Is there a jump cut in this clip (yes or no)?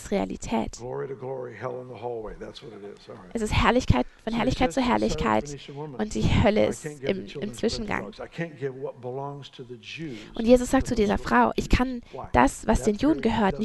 no